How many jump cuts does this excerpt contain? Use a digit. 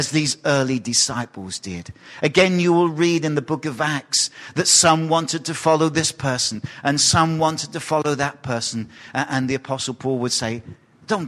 0